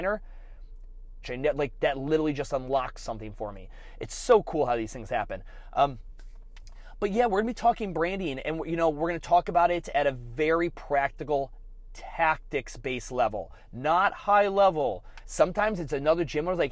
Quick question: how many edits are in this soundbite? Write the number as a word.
two